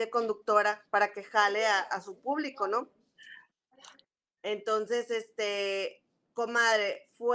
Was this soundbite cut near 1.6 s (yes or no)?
no